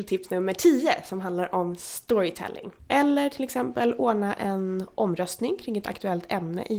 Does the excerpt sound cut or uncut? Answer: cut